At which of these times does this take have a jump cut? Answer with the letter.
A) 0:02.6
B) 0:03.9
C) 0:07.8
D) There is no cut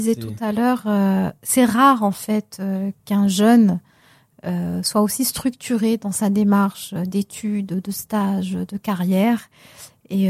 D